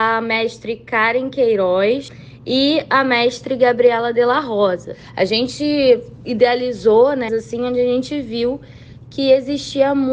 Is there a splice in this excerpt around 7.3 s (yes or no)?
yes